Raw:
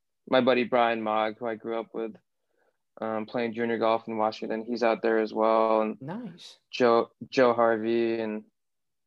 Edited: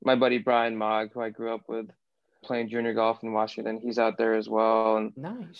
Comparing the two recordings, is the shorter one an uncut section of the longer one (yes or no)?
no